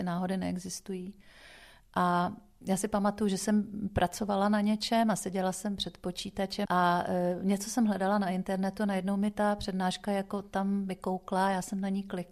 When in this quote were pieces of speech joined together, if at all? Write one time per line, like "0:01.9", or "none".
0:06.7